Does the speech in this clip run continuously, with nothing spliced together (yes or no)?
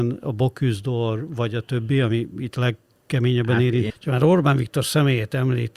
no